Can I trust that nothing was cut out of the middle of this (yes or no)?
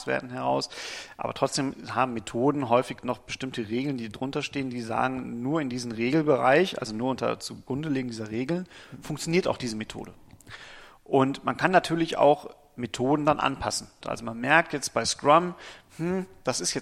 no